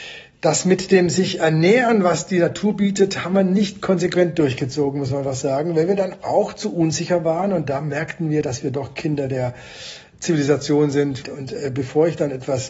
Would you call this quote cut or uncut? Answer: cut